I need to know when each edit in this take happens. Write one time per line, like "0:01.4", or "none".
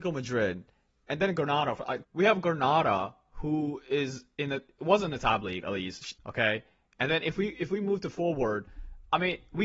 0:02.0
0:06.2